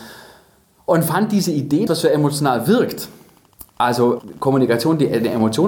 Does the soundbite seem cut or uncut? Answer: cut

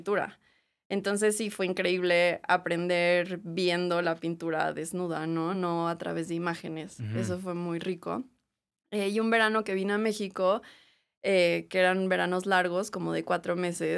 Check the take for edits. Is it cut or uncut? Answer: uncut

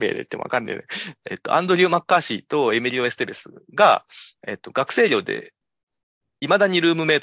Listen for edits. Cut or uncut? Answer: cut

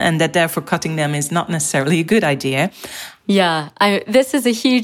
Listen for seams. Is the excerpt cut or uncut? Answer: cut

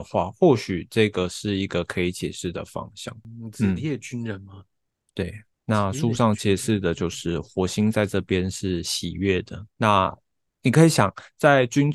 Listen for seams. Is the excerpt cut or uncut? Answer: cut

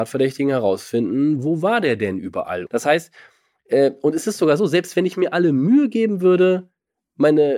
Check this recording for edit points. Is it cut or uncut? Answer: cut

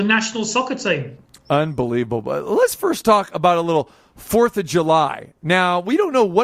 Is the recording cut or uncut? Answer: uncut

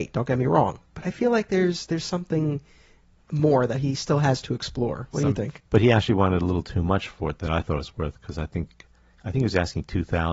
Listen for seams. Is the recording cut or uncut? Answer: cut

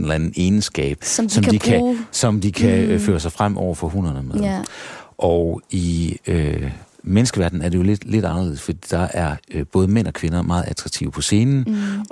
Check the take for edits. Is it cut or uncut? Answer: uncut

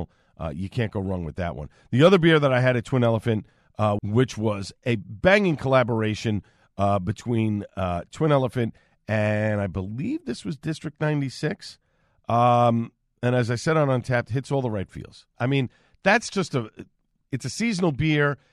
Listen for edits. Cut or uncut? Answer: cut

